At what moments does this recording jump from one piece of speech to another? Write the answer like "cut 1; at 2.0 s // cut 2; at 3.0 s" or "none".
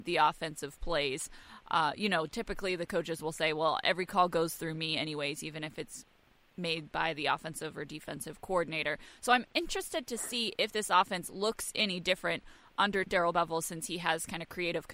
none